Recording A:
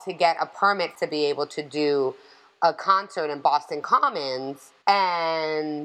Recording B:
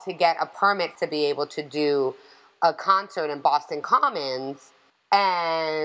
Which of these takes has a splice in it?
A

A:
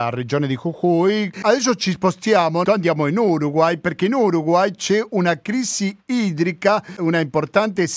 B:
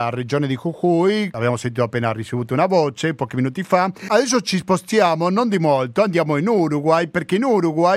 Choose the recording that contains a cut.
A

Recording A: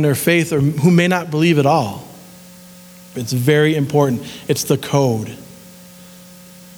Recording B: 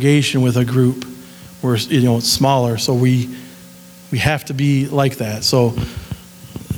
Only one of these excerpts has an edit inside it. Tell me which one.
A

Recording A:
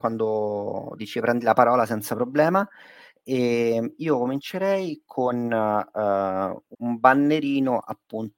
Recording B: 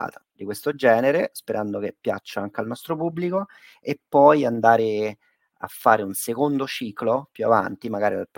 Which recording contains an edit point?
A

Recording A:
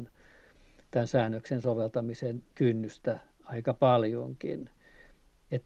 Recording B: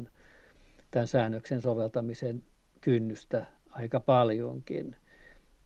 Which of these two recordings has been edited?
A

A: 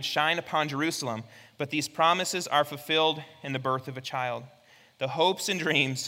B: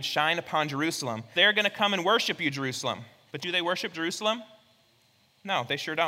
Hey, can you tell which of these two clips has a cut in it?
B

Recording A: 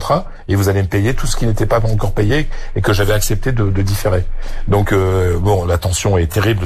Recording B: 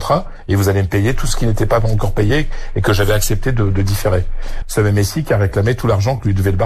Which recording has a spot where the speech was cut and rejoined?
B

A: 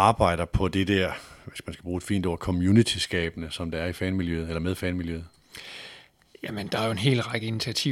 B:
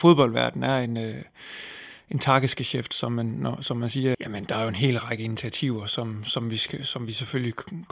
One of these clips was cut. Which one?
B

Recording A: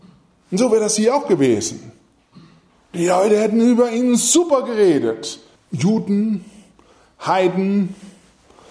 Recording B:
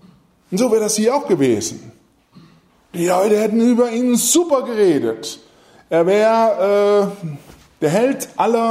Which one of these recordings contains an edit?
A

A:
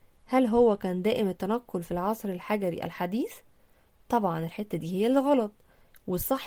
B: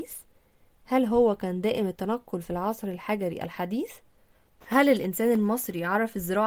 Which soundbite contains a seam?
B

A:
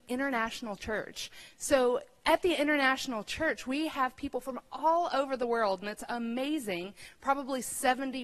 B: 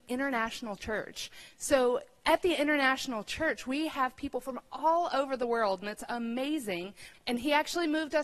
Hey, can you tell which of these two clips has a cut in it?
B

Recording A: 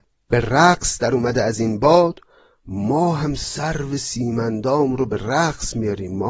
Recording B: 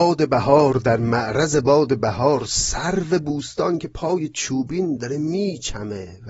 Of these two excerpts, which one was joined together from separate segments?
B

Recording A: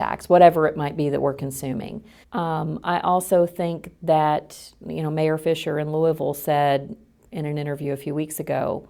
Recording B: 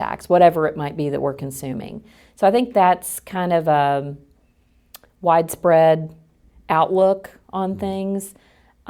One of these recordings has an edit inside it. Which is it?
A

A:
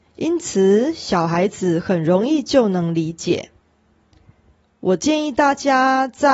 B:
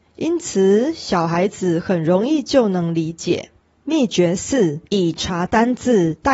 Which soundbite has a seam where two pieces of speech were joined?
B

